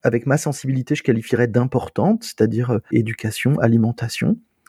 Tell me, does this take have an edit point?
yes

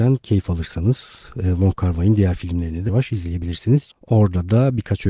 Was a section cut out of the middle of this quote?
yes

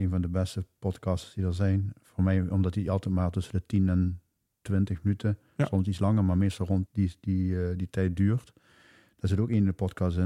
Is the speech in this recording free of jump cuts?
no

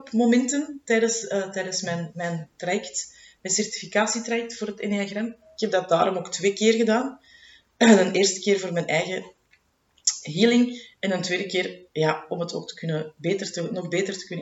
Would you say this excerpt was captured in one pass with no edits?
yes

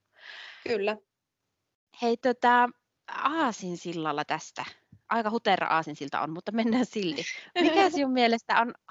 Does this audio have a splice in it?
no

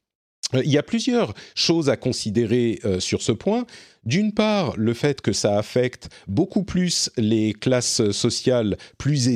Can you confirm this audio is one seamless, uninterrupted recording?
yes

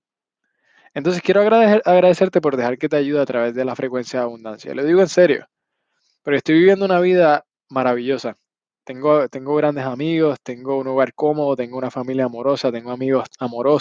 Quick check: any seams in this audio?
no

